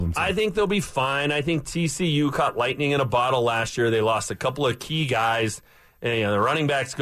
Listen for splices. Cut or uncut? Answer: uncut